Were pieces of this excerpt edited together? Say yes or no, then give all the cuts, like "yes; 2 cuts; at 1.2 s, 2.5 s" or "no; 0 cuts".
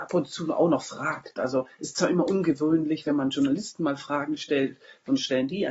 no; 0 cuts